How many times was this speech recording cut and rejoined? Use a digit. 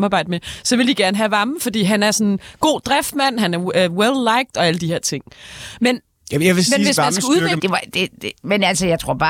1